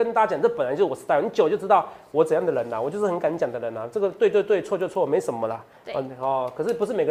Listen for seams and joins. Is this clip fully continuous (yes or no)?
yes